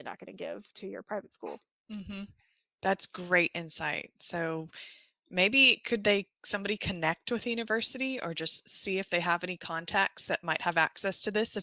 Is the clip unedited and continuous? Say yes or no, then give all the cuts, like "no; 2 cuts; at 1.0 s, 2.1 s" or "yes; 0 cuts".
yes; 0 cuts